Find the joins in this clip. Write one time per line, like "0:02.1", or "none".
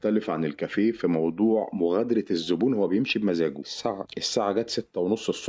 none